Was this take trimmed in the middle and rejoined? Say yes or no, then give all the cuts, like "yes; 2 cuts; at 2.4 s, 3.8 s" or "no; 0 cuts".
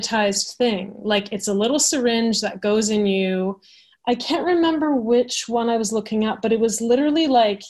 no; 0 cuts